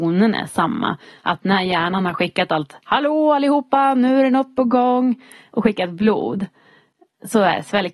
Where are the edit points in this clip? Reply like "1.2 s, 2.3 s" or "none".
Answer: none